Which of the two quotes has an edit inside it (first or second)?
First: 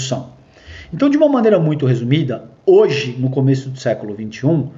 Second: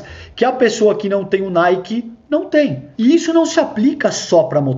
second